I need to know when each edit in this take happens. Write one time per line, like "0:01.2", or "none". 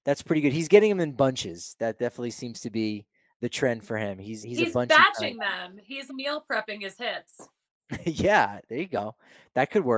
0:04.4
0:06.1